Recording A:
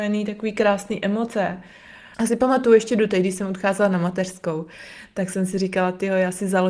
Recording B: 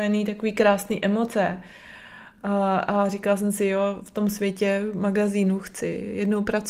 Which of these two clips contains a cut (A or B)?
A